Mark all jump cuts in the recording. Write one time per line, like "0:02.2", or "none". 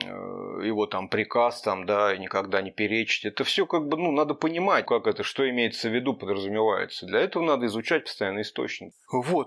0:04.9